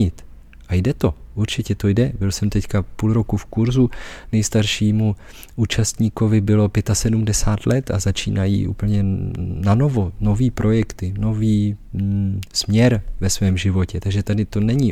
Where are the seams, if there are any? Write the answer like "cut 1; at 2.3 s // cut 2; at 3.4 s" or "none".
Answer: none

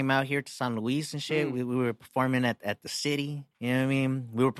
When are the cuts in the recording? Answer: cut 1; at 3.5 s

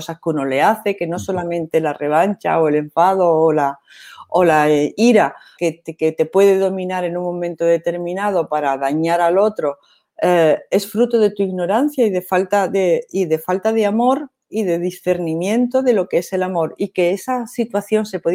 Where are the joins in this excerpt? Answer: cut 1; at 5.6 s

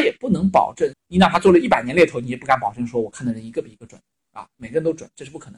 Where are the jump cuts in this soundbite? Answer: cut 1; at 0.9 s // cut 2; at 4.5 s

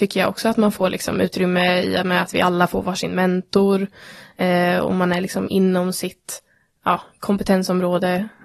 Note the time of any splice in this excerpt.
none

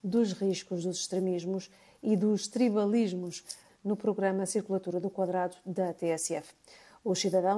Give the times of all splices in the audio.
cut 1; at 3.7 s

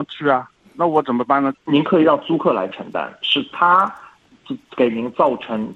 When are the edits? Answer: cut 1; at 1.5 s

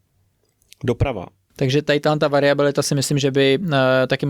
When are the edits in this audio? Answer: cut 1; at 1.5 s

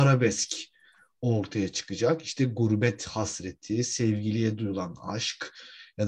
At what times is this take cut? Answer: none

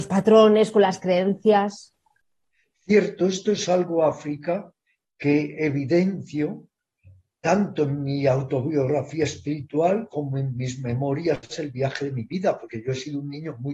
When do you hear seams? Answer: none

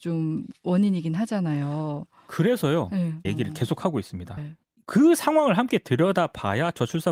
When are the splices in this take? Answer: cut 1; at 3.3 s // cut 2; at 4.4 s

